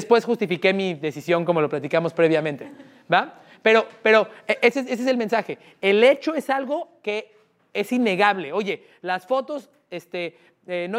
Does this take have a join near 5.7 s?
no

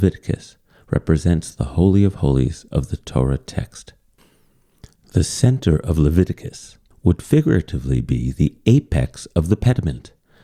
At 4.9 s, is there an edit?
no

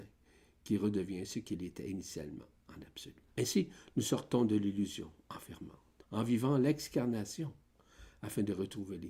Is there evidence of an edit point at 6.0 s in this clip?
yes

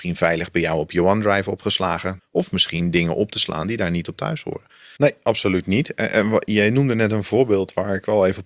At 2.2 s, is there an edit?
yes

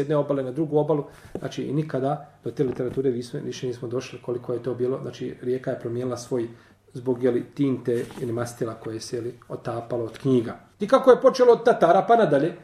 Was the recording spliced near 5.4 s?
no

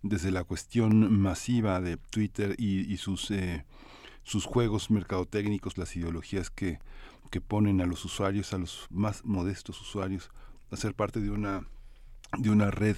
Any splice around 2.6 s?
no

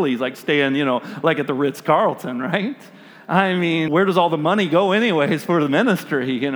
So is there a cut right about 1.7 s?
no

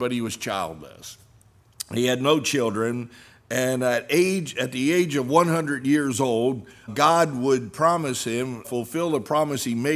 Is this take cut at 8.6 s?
yes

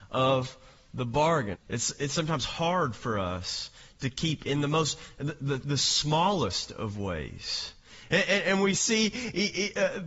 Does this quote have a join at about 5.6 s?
no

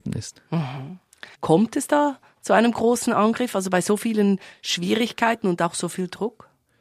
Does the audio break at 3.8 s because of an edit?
no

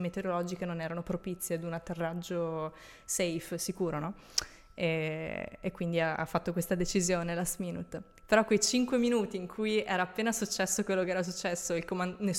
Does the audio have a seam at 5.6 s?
no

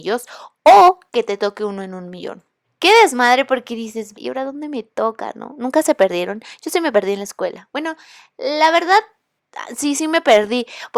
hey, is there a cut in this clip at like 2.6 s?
yes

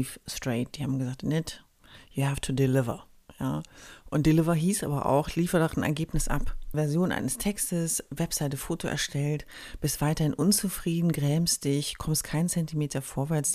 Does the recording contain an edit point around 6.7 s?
yes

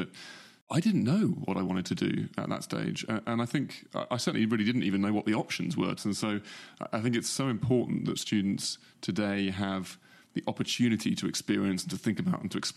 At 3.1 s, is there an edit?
no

